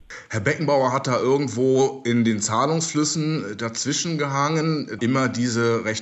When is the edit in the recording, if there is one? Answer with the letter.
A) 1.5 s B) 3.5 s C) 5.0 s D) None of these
C